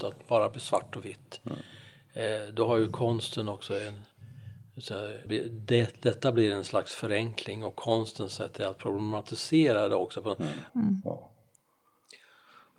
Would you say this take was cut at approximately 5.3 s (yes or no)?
yes